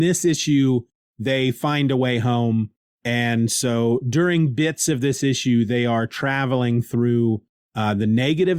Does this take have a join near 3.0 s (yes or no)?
no